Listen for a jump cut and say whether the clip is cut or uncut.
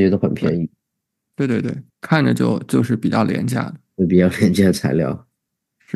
cut